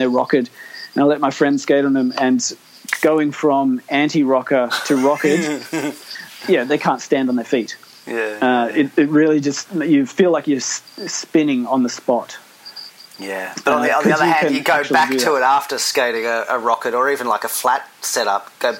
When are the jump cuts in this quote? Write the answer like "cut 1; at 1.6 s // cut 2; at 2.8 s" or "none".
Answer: none